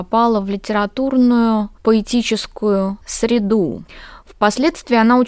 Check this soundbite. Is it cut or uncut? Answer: uncut